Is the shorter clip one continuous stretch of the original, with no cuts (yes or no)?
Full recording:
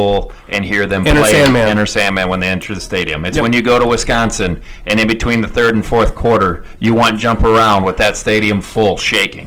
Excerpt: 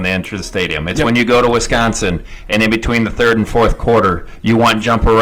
yes